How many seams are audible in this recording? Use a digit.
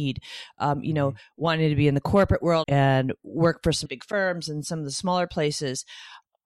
2